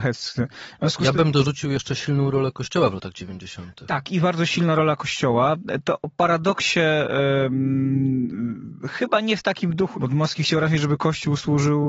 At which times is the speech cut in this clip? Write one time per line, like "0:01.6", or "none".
0:09.9